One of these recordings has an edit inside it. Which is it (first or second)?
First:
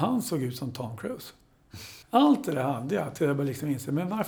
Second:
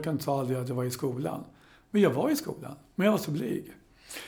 first